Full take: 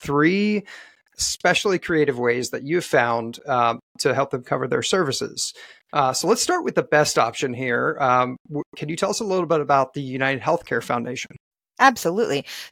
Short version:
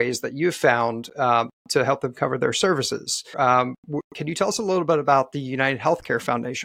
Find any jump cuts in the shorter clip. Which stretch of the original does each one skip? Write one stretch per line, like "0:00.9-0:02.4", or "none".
0:05.6-0:07.9